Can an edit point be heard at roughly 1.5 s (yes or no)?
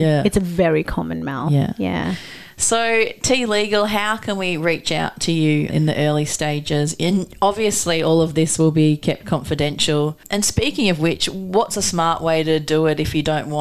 no